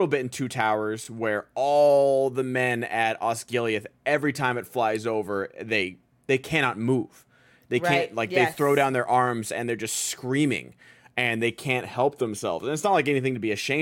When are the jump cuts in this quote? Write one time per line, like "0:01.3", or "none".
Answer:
none